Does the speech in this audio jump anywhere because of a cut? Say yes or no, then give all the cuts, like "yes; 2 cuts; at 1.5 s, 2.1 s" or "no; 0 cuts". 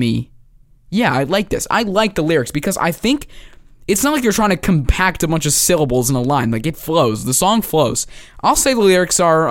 no; 0 cuts